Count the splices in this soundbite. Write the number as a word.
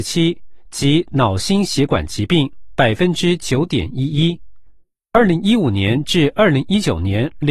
zero